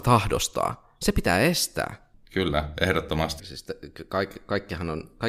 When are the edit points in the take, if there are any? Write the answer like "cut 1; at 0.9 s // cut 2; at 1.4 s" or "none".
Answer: cut 1; at 2.1 s // cut 2; at 3.4 s

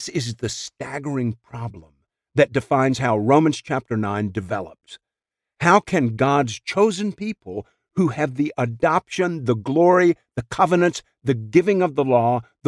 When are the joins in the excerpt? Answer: none

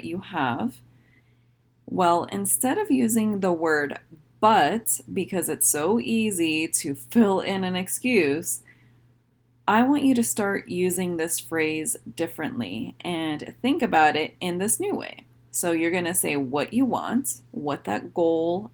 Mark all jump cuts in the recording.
cut 1; at 1.8 s

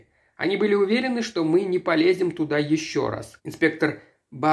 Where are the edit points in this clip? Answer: cut 1; at 3.4 s

